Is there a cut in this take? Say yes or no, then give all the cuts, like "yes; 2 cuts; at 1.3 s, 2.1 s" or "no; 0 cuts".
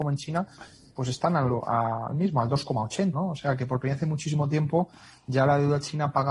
yes; 1 cut; at 3.1 s